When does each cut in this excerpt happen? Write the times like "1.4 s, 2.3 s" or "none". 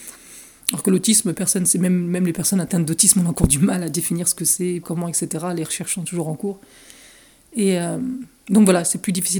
4.8 s